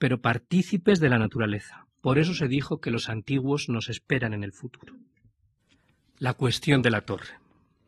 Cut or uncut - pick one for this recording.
uncut